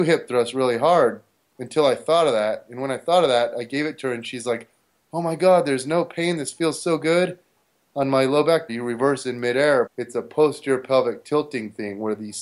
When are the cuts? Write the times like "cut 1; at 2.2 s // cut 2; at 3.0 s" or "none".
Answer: cut 1; at 8.7 s // cut 2; at 9.9 s

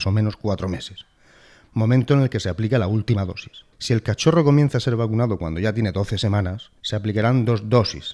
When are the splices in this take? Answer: cut 1; at 3.7 s // cut 2; at 6.8 s

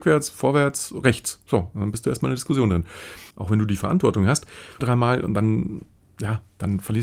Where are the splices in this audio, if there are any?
cut 1; at 3.3 s // cut 2; at 4.8 s

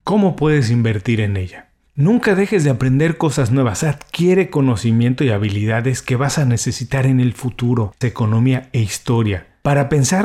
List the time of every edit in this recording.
cut 1; at 8.0 s

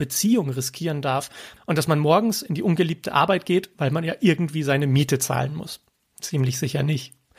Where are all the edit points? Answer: cut 1; at 6.1 s

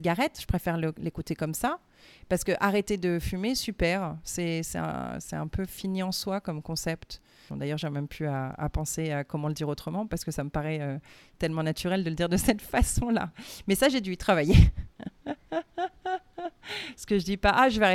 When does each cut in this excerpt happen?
cut 1; at 7.5 s

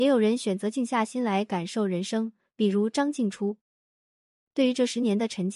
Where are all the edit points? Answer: cut 1; at 2.5 s

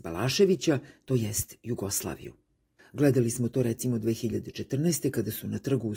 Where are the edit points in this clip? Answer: cut 1; at 2.8 s

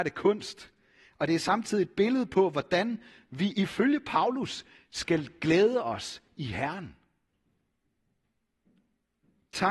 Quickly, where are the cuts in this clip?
none

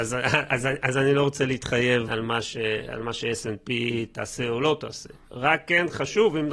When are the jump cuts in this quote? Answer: cut 1; at 2.1 s

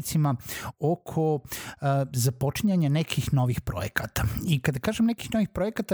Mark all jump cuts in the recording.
none

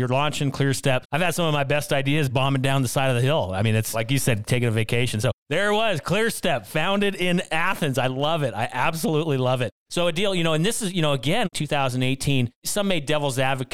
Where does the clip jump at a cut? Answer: cut 1; at 1.0 s // cut 2; at 11.5 s

